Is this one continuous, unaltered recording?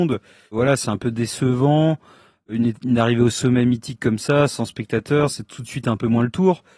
yes; 0 cuts

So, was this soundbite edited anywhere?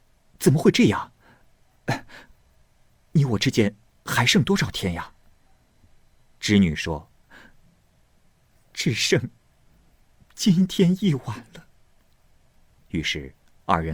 no; 0 cuts

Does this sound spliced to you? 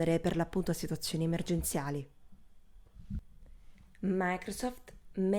no; 0 cuts

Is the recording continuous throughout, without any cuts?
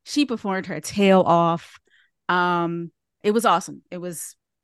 no; 1 cut; at 3.2 s

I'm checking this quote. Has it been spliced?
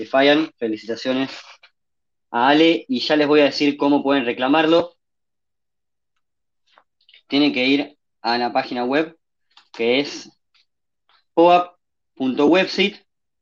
no; 0 cuts

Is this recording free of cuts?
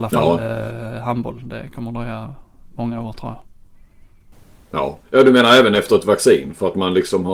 no; 1 cut; at 5.0 s

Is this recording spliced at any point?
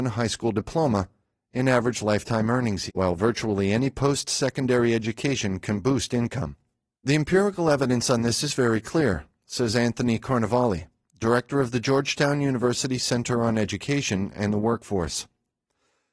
yes; 2 cuts; at 2.9 s, 6.9 s

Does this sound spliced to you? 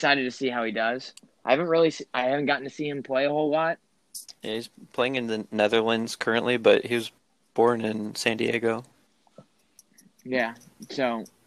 no; 0 cuts

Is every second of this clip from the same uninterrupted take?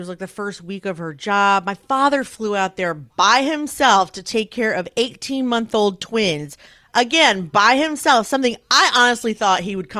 yes; 0 cuts

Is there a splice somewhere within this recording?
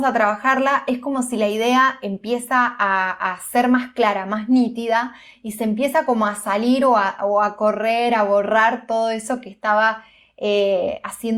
no; 0 cuts

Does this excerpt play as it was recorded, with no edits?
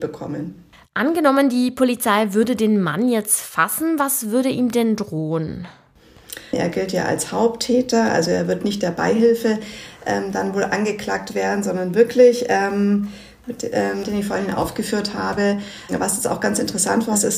no; 2 cuts; at 6.5 s, 14.0 s

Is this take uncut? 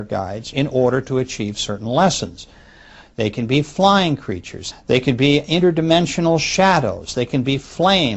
no; 2 cuts; at 3.0 s, 4.7 s

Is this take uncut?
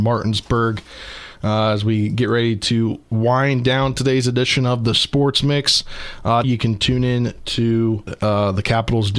no; 2 cuts; at 6.4 s, 8.1 s

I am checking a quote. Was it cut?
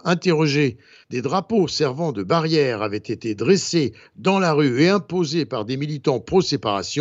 yes; 1 cut; at 1.0 s

